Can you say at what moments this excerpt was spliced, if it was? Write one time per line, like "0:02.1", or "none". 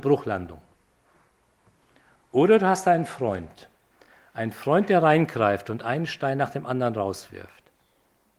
none